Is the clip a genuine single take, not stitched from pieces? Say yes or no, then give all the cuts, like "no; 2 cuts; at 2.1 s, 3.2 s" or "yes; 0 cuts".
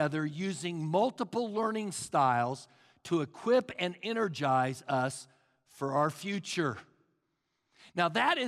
yes; 0 cuts